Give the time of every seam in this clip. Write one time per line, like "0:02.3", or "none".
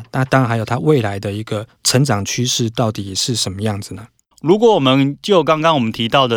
0:01.8
0:04.3